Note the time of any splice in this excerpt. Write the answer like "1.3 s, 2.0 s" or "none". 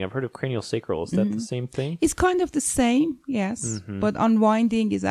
none